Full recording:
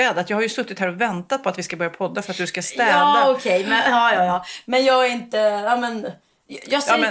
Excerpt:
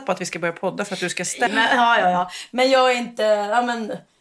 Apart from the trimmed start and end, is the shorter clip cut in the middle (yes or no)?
yes